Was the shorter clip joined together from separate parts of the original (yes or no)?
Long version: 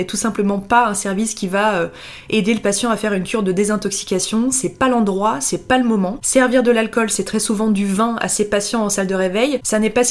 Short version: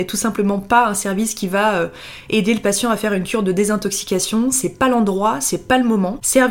no